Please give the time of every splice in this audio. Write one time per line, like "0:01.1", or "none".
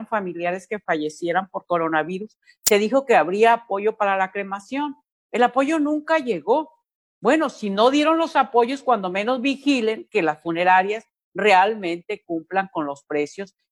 none